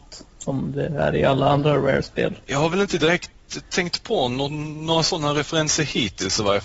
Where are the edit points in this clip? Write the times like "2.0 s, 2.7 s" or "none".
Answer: 2.4 s